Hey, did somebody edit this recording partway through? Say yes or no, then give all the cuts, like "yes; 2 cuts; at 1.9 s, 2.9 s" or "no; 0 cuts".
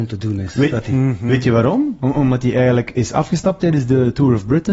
no; 0 cuts